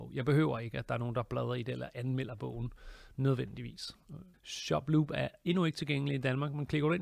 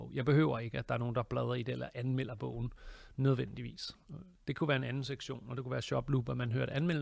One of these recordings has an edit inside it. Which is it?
first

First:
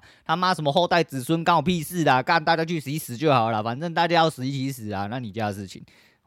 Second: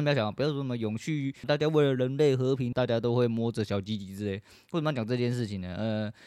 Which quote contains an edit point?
second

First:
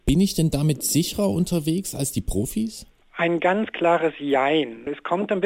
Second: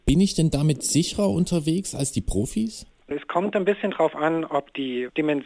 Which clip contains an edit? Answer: second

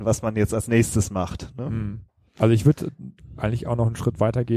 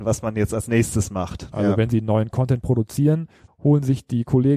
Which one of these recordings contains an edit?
second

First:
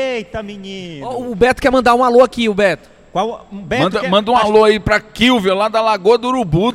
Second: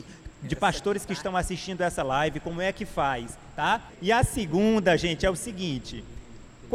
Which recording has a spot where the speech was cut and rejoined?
second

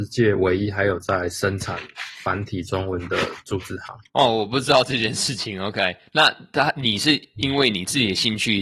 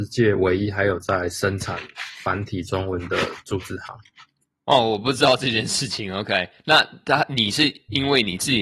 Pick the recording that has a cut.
first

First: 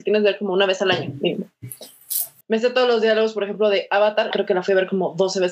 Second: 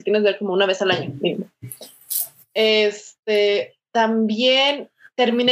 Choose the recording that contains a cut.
first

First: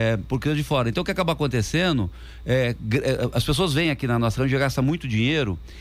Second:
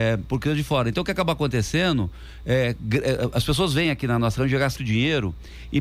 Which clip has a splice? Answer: second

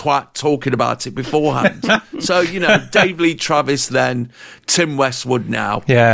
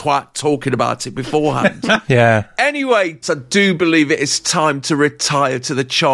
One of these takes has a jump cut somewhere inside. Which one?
second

